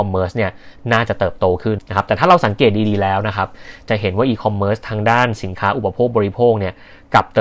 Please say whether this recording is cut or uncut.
cut